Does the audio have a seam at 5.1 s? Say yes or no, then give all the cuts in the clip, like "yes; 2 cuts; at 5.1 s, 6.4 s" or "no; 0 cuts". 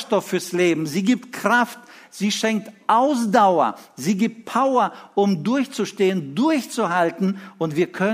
no; 0 cuts